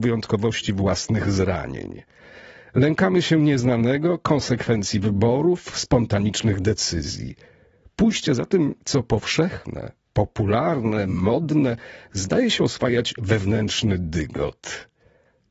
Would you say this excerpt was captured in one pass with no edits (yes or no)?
yes